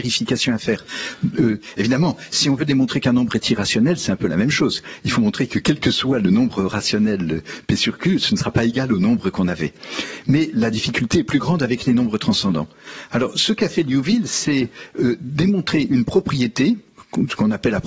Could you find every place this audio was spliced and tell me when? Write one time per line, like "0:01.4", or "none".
none